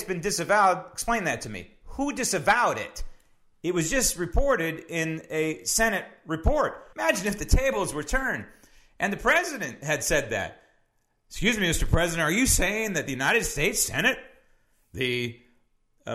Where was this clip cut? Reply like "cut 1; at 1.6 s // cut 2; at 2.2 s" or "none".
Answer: cut 1; at 6.9 s